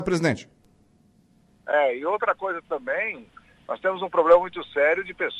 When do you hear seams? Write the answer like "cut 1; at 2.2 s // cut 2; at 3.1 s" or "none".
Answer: none